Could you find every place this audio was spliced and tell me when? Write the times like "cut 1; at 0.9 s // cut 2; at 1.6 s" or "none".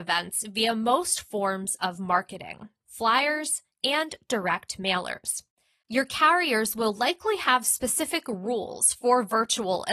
cut 1; at 2.8 s // cut 2; at 5.8 s